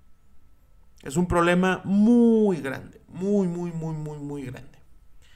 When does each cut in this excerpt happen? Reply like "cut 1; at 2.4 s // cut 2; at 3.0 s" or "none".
none